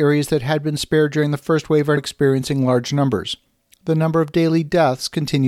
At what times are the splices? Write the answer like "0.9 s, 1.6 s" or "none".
2.0 s